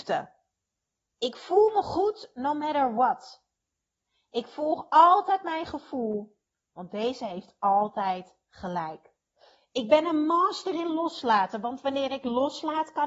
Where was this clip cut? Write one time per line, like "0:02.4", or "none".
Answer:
none